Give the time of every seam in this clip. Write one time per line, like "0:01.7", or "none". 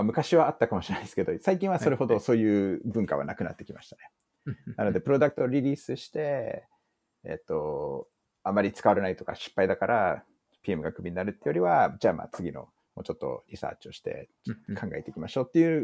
none